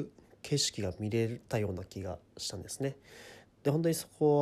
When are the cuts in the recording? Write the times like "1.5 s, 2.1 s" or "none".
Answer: 3.4 s